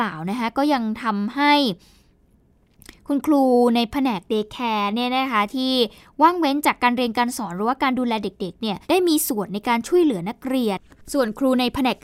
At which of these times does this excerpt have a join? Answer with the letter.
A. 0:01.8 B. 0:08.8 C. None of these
B